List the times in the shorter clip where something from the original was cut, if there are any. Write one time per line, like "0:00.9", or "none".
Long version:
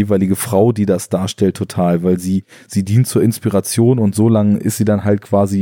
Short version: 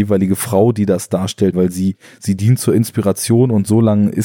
0:01.5

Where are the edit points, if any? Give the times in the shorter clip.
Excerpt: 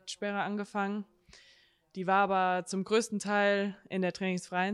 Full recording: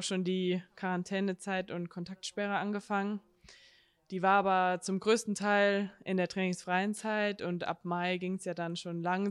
none

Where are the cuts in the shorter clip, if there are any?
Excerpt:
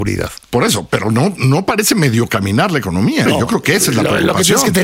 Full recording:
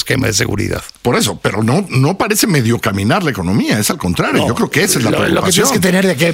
0:03.3

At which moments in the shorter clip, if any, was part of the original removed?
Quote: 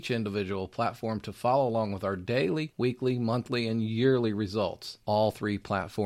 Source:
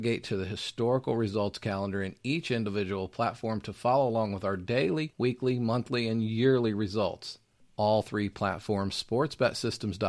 0:05.0

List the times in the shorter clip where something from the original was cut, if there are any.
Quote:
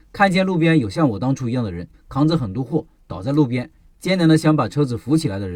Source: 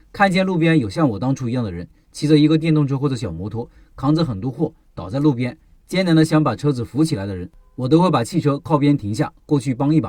0:01.9

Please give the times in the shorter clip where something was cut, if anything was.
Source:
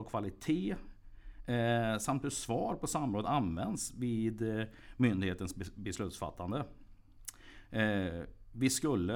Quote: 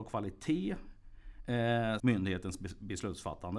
0:02.0

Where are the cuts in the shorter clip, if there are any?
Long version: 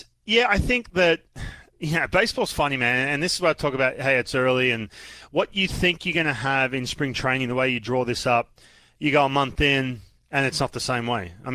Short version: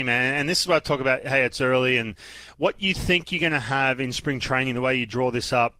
none

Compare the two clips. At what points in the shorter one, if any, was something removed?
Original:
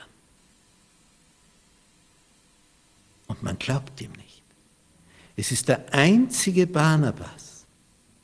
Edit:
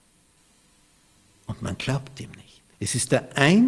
0:02.7

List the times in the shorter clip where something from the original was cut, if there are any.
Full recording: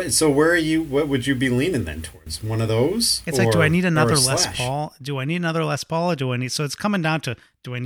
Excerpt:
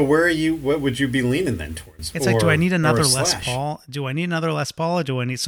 0:02.1

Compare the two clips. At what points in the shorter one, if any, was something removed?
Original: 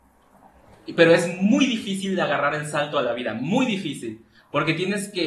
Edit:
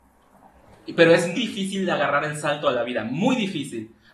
0:01.4

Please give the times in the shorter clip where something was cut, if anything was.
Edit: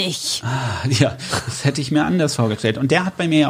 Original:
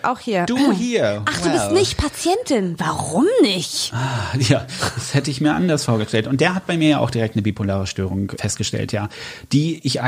none

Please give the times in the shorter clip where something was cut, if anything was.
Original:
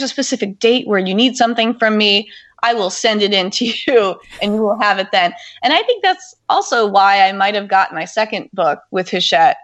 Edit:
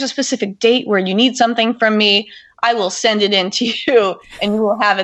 none

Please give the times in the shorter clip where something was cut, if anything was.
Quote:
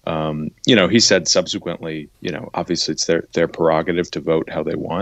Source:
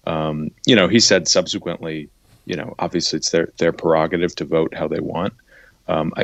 0:02.1

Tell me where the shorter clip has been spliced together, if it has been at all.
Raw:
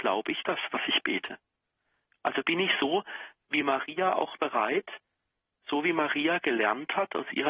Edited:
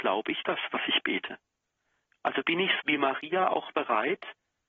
0:02.8

